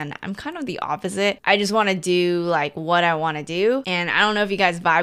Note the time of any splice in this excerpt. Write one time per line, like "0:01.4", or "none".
none